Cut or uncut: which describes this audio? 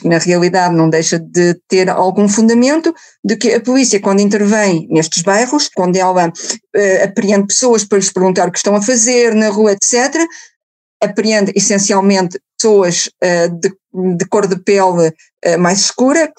cut